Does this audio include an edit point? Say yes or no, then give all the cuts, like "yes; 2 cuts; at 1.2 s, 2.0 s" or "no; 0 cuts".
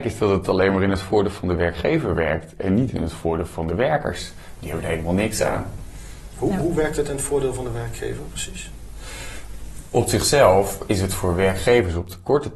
no; 0 cuts